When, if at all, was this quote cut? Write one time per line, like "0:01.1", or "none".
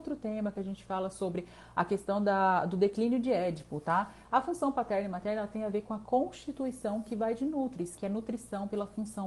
0:04.2
0:08.0